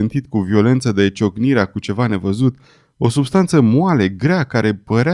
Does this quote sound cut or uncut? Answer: uncut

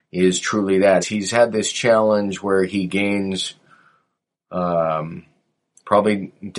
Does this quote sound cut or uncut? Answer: cut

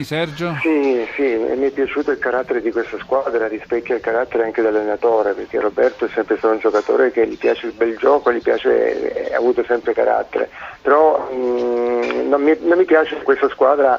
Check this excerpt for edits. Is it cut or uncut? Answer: uncut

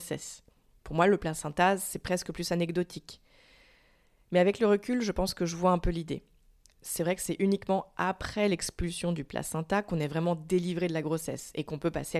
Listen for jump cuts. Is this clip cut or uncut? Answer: uncut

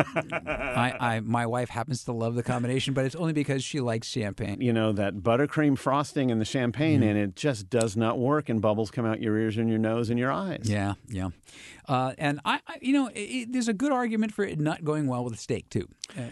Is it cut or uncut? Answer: cut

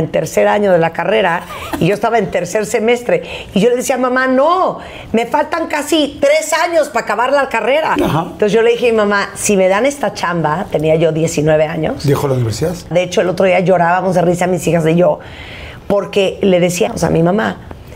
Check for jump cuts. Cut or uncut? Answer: cut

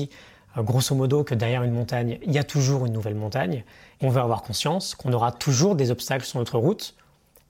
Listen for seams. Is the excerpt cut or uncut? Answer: cut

